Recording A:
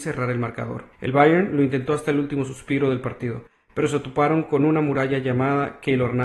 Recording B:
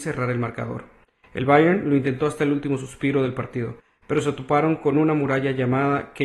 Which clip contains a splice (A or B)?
A